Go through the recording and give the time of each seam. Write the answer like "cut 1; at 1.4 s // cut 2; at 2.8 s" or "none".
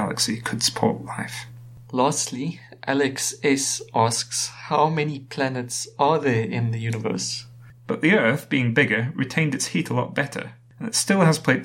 cut 1; at 7.7 s